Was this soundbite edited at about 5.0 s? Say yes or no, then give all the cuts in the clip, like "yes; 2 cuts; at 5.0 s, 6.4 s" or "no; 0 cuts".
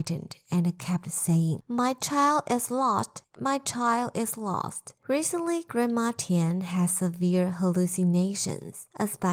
yes; 1 cut; at 5.0 s